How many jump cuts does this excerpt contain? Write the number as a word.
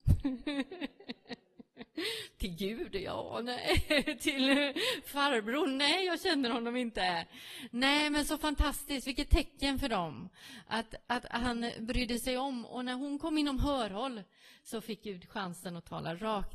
zero